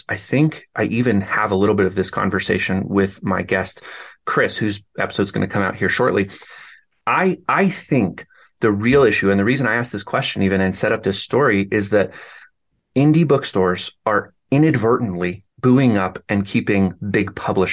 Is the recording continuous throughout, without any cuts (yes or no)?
no